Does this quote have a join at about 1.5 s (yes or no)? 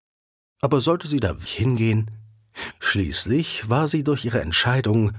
yes